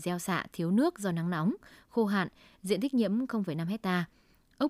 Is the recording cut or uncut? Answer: uncut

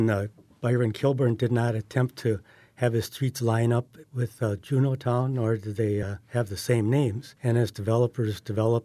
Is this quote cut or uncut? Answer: uncut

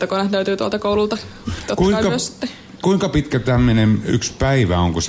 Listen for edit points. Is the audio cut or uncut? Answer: uncut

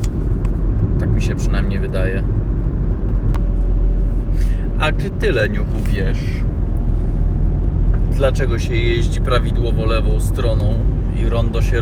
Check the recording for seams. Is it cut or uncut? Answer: uncut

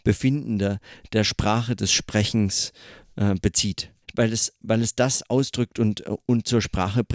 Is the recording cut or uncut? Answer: cut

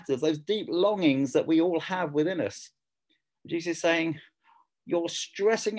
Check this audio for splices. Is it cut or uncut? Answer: uncut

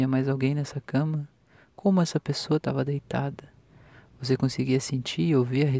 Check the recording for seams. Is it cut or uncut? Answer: uncut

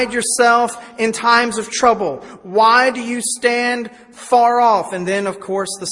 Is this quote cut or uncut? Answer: uncut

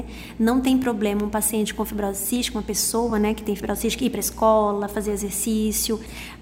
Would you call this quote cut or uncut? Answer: uncut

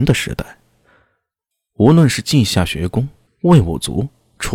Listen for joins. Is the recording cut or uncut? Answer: cut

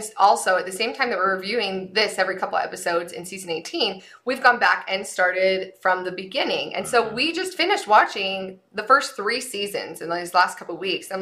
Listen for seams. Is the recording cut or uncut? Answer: uncut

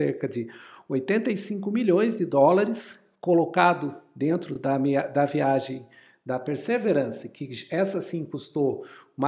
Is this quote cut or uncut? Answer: uncut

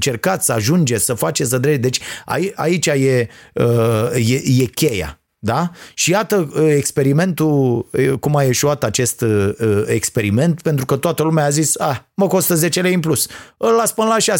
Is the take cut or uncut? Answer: uncut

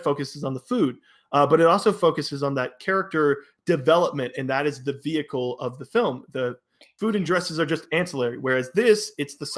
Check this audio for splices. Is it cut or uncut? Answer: uncut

